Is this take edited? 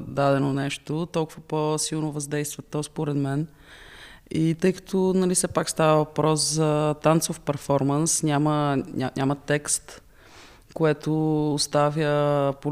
no; 0 cuts

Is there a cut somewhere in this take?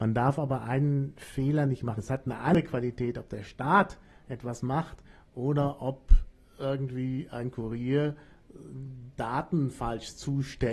yes; 1 cut; at 2.0 s

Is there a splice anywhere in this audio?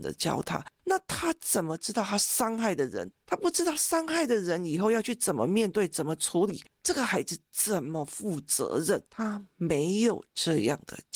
yes; 1 cut; at 9.1 s

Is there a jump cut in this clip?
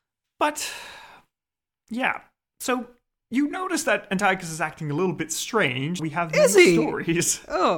yes; 1 cut; at 6.0 s

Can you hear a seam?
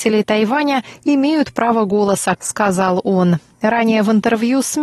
yes; 1 cut; at 2.4 s

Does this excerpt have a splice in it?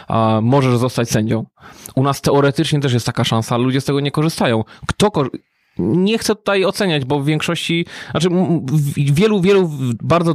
no; 0 cuts

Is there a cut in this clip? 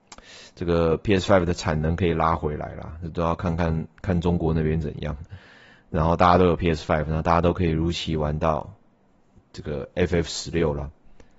no; 0 cuts

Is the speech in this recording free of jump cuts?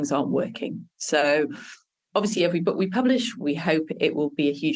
yes; 0 cuts

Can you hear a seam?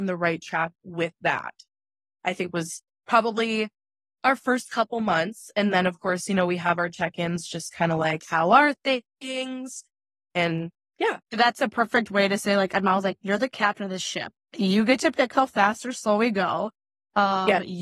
yes; 1 cut; at 11.2 s

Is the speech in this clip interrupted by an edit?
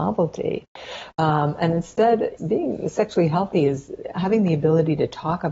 yes; 2 cuts; at 1.1 s, 2.4 s

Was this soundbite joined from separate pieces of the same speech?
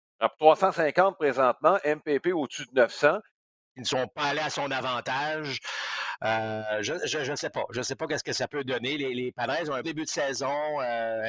yes; 2 cuts; at 3.7 s, 9.8 s

